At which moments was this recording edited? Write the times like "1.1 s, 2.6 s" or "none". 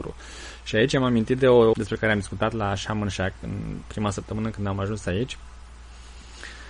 1.7 s